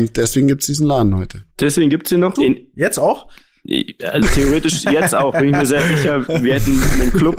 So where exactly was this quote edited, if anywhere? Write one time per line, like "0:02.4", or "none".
0:02.4